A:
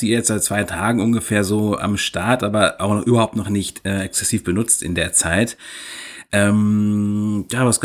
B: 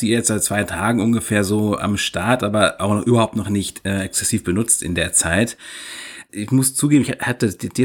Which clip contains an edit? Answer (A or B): B